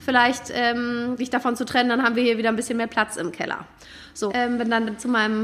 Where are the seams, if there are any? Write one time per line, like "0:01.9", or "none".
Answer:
0:01.2
0:04.3